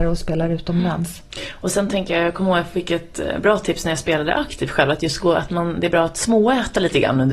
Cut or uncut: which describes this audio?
uncut